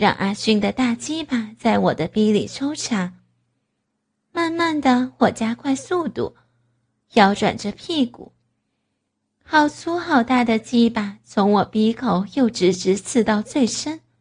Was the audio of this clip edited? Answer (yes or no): no